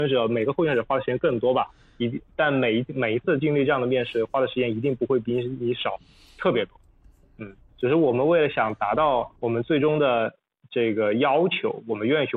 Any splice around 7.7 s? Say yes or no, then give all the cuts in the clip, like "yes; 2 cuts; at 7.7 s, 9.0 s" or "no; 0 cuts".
yes; 2 cuts; at 7.7 s, 9.4 s